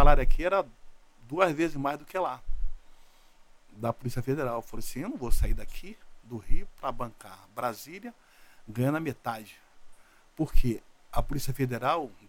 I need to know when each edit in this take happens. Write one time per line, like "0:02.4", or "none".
none